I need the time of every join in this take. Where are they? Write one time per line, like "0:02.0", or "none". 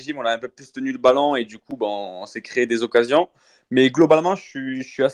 none